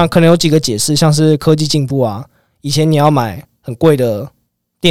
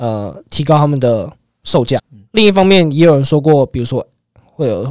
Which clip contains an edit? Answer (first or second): second